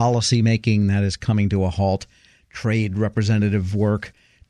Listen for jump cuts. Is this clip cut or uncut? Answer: uncut